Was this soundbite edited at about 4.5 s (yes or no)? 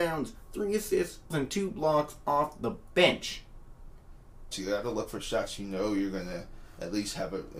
yes